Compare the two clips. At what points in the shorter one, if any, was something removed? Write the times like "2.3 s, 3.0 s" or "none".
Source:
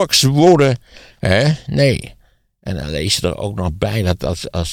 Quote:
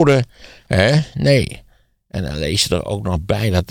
none